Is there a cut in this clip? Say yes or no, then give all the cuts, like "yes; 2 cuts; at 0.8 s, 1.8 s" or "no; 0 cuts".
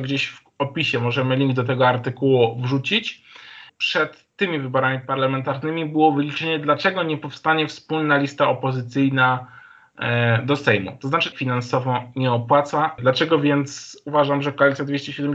yes; 3 cuts; at 3.7 s, 11.3 s, 13.0 s